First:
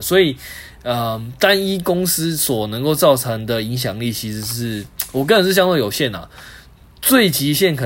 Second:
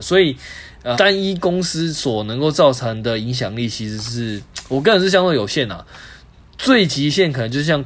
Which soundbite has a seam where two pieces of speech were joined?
second; 1 cut; at 0.9 s

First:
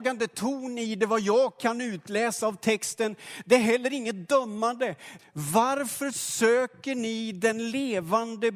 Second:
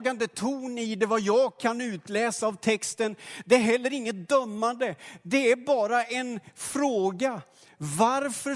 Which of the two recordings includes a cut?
first; 1 cut; at 5.2 s

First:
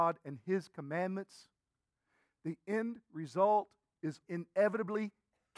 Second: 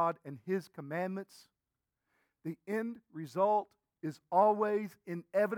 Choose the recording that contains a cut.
first; 1 cut; at 4.2 s

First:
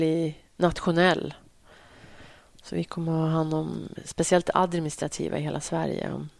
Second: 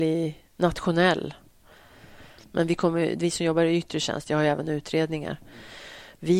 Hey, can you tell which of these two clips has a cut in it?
second; 2 cuts; at 2.4 s, 4.2 s

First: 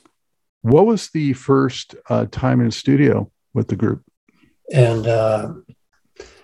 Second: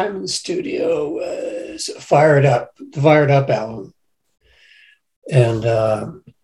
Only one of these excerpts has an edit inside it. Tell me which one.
first; 1 cut; at 4.6 s

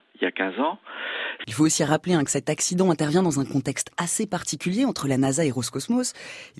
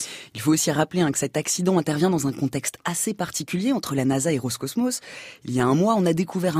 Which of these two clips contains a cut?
first; 1 cut; at 1.4 s

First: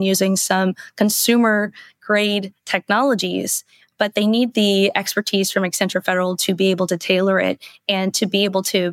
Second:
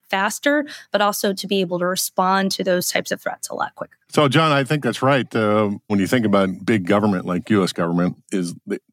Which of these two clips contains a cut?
second; 3 cuts; at 4.1 s, 5.9 s, 7.7 s

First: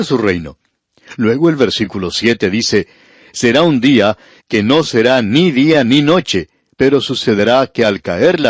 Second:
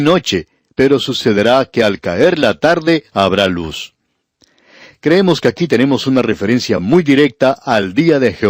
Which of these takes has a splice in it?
first; 1 cut; at 4.4 s

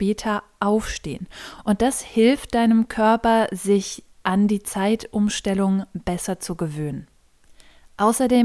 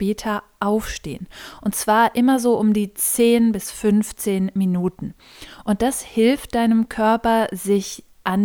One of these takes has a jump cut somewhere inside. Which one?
first; 1 cut; at 1.5 s

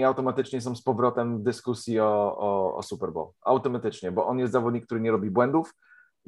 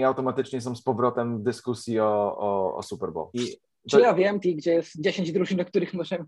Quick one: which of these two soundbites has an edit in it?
second; 2 cuts; at 3.3 s, 4.4 s

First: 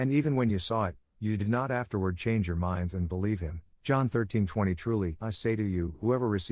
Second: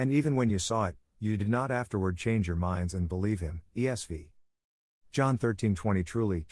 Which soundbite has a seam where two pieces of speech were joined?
first; 2 cuts; at 3.7 s, 5.2 s

